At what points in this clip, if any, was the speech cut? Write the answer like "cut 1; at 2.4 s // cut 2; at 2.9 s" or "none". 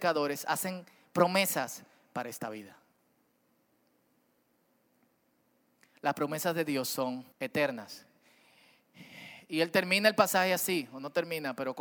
cut 1; at 7.3 s